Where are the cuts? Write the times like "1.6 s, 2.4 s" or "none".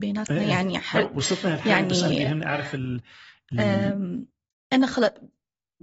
none